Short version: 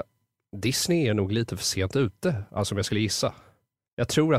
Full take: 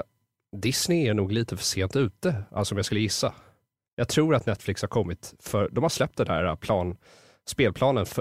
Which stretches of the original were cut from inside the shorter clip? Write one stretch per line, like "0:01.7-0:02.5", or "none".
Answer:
none